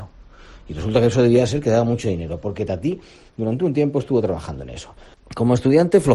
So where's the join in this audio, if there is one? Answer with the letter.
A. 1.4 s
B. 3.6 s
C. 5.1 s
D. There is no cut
C